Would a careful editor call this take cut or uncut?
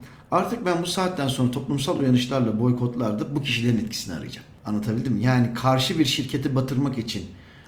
uncut